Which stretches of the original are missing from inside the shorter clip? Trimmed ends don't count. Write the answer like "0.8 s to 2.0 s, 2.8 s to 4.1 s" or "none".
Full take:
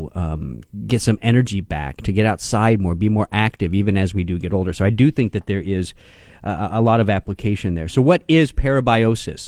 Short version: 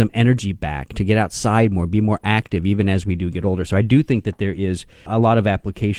6.1 s to 6.7 s